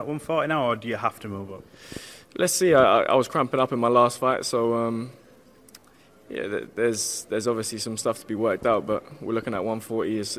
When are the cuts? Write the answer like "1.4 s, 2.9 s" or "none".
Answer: none